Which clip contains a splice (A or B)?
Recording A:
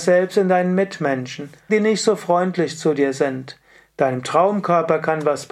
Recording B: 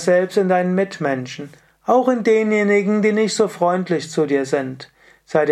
A